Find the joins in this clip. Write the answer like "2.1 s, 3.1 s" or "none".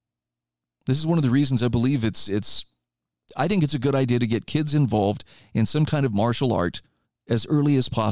none